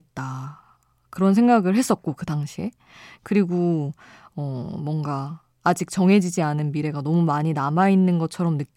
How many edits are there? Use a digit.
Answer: 0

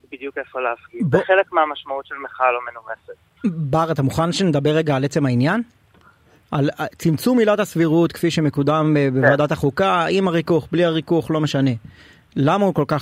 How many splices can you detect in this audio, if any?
0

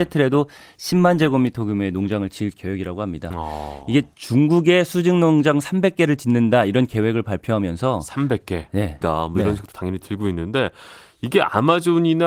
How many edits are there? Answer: 1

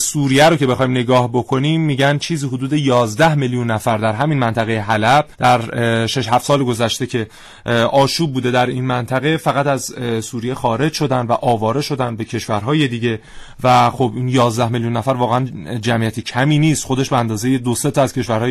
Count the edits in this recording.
1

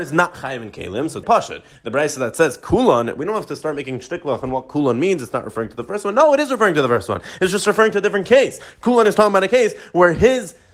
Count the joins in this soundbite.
1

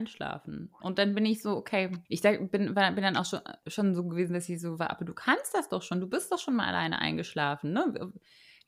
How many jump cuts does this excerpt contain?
1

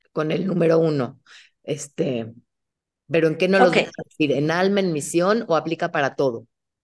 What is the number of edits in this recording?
0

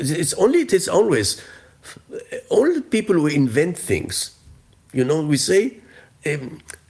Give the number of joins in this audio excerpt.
0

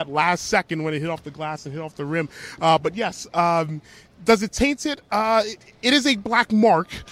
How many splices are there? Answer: 0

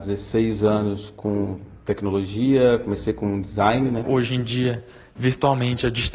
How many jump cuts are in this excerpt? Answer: 1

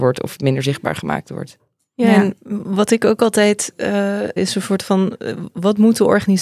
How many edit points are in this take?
1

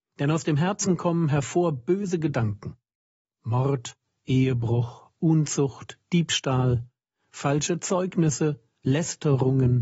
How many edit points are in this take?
0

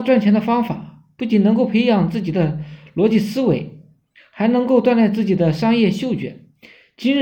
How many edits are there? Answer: 0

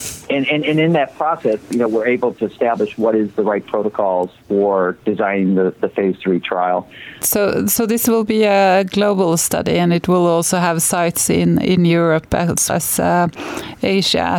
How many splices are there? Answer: 2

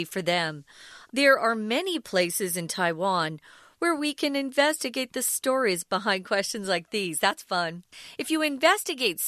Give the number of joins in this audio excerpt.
1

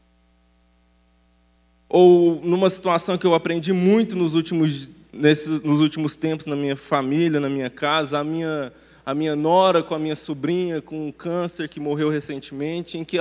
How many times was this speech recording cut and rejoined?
0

